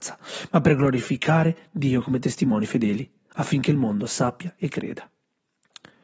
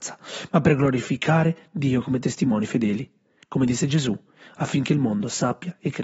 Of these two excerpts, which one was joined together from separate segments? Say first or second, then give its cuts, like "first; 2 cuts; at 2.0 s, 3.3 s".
first; 1 cut; at 3.3 s